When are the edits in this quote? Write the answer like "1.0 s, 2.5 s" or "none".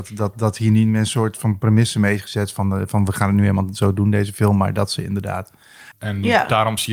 5.9 s